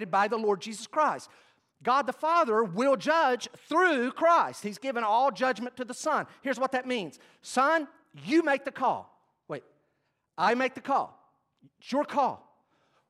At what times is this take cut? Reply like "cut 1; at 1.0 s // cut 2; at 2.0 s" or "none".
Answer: none